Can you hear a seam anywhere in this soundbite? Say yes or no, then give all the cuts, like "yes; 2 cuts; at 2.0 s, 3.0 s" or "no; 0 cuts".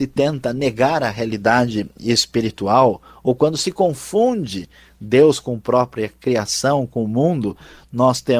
no; 0 cuts